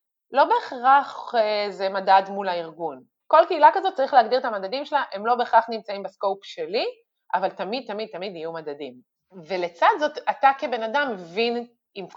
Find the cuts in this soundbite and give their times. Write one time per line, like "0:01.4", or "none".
none